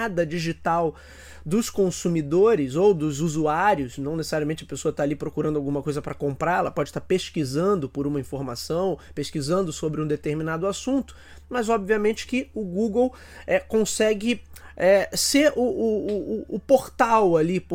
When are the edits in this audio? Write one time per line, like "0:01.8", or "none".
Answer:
none